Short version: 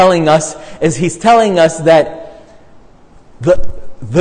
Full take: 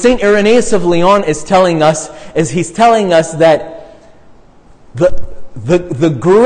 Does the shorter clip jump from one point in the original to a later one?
no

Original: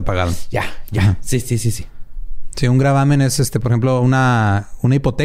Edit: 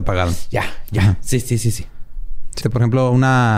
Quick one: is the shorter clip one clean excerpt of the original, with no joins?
no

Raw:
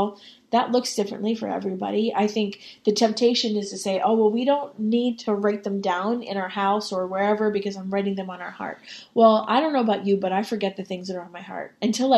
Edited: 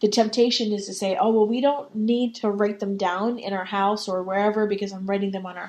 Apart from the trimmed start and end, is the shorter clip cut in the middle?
no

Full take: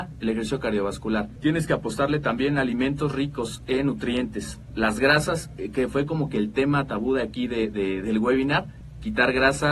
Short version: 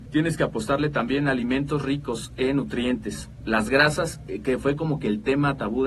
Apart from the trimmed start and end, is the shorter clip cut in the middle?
no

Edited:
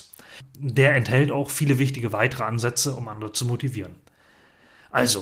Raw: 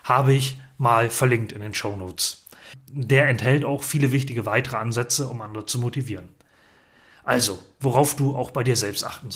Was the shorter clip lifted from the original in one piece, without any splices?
yes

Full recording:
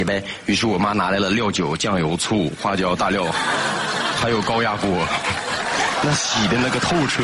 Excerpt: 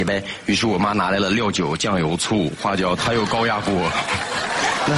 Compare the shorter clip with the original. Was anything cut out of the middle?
yes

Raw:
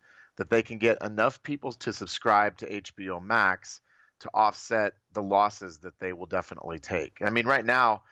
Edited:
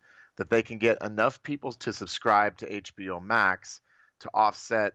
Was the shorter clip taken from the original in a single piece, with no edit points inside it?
yes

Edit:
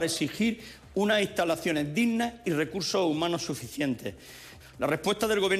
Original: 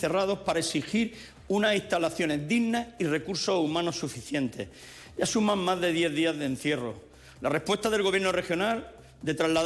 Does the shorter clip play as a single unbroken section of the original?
no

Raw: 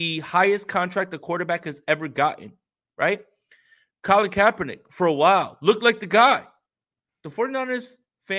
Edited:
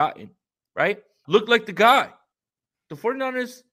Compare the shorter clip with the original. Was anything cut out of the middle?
yes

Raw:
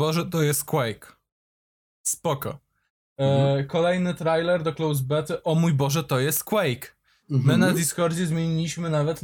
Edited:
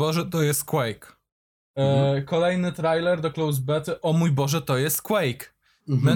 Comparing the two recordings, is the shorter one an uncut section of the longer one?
no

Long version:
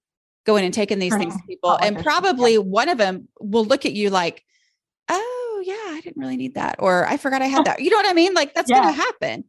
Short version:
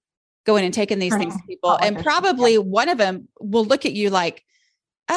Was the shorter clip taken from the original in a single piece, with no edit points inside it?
yes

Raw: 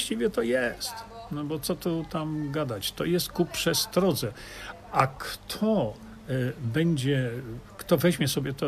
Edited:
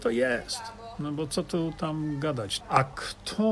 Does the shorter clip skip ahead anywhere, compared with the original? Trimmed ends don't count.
yes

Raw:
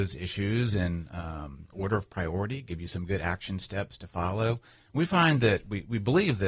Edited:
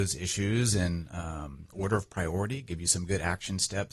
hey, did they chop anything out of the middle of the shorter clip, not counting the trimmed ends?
no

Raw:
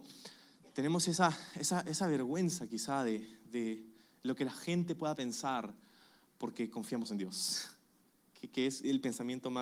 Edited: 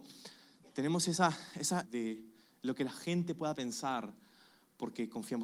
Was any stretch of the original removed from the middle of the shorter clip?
yes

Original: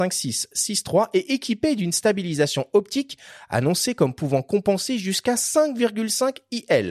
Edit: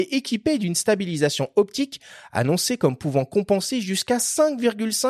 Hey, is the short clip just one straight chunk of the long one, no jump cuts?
yes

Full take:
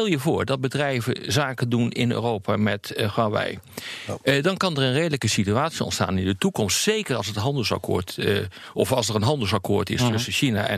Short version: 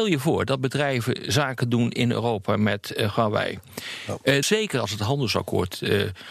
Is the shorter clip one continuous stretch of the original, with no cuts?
no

